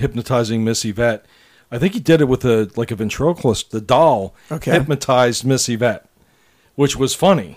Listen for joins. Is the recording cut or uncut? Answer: cut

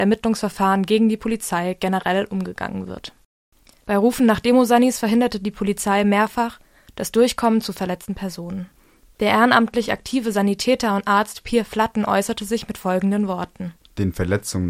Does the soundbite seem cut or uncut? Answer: cut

